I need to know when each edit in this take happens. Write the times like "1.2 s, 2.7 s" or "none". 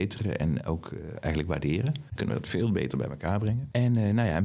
2.2 s